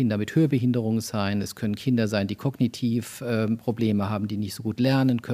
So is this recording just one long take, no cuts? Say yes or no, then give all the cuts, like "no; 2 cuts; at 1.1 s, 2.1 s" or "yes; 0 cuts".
yes; 0 cuts